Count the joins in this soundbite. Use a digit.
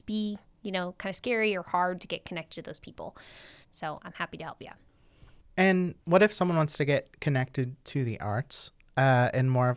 2